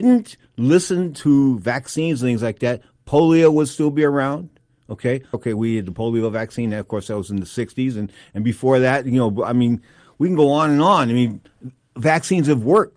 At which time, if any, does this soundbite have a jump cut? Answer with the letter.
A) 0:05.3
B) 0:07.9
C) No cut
A